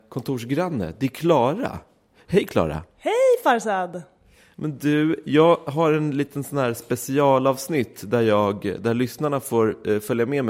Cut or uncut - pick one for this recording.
uncut